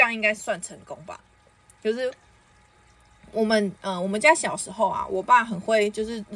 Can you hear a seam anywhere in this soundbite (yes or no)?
no